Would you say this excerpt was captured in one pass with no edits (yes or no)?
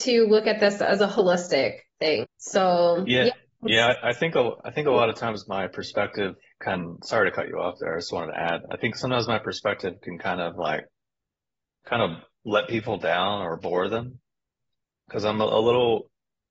no